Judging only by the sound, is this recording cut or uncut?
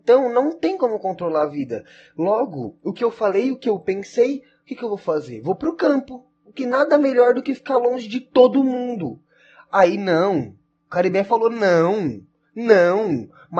uncut